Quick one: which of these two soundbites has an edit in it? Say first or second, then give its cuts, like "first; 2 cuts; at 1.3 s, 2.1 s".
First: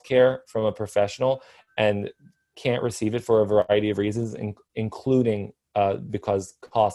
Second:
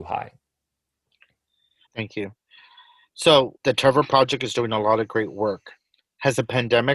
second; 2 cuts; at 1.9 s, 3.6 s